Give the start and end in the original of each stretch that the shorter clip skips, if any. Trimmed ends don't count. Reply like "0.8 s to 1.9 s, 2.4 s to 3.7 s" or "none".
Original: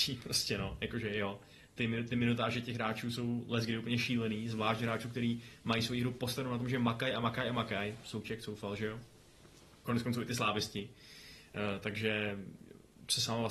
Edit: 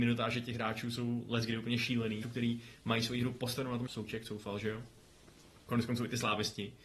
4.4 s to 5.0 s, 6.7 s to 8.0 s